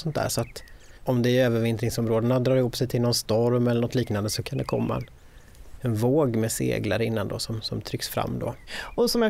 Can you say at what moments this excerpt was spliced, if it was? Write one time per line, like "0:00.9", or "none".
0:01.0

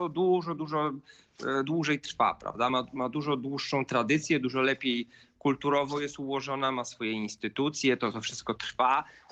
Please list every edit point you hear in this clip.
none

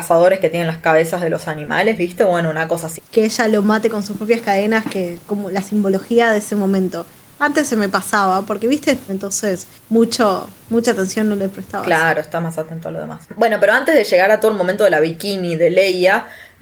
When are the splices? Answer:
0:03.0
0:09.1

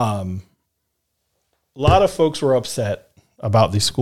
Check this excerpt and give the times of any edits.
none

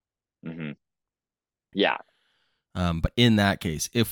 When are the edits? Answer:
0:01.7

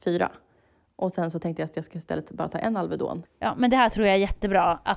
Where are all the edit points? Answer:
0:03.3

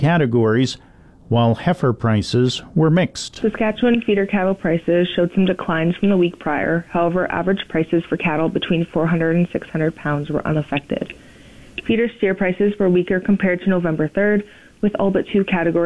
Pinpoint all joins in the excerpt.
none

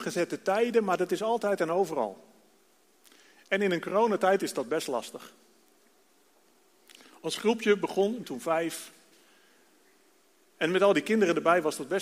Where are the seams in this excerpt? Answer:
0:08.2

